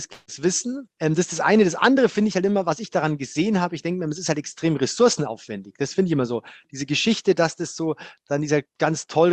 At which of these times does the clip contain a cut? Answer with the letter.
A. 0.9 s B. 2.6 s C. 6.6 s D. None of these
D